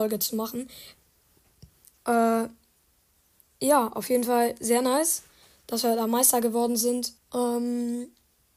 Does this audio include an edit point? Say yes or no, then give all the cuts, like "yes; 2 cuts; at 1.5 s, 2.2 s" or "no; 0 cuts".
yes; 2 cuts; at 2.0 s, 7.2 s